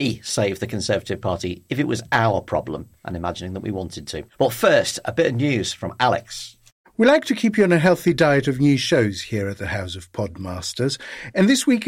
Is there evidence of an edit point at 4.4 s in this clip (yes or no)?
no